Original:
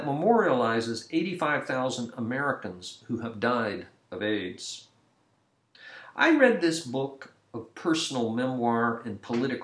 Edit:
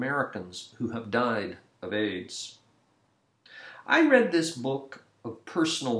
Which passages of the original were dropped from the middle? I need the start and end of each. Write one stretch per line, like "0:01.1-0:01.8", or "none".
none